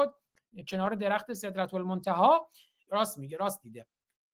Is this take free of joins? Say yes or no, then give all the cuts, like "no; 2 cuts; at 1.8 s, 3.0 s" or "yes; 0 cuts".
no; 1 cut; at 2.9 s